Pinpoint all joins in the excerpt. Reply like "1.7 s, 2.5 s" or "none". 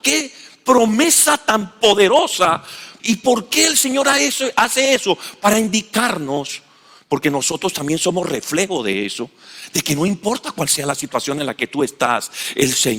3.0 s